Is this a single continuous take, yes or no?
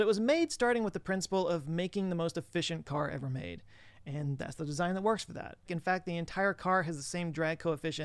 no